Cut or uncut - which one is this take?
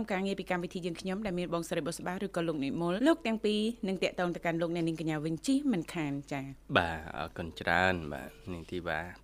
cut